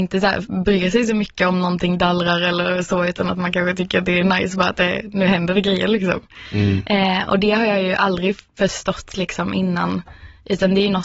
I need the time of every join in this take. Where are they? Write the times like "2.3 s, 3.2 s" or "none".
none

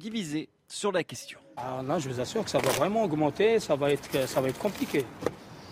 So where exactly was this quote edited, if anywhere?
1.6 s

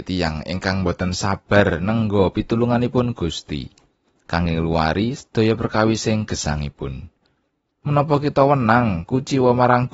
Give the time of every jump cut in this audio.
7.7 s

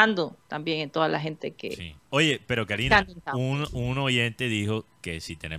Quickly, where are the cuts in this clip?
2.1 s

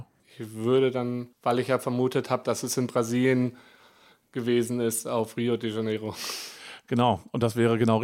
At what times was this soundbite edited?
1.3 s

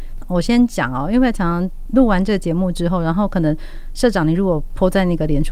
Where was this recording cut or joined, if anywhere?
none

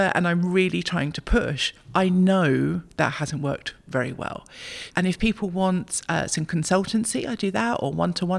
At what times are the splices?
4.9 s

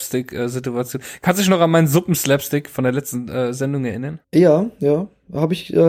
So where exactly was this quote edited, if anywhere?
4.2 s

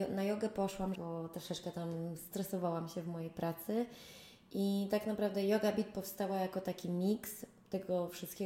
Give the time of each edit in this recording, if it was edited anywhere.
1.0 s

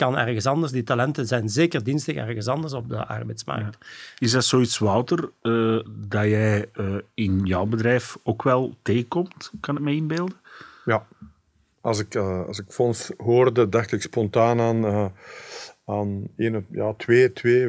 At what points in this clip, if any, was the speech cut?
5.9 s

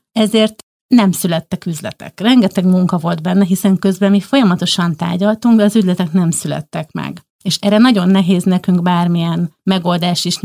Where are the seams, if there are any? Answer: none

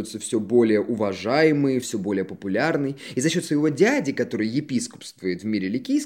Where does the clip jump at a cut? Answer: 1.8 s

